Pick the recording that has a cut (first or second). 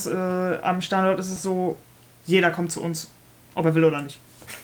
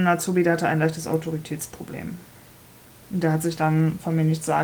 first